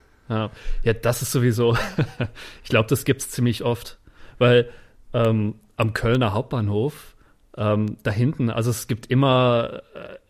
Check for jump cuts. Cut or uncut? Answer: uncut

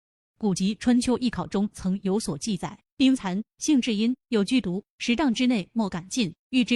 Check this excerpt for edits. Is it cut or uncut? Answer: uncut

